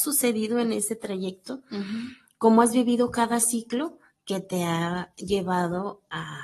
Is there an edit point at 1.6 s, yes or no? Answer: no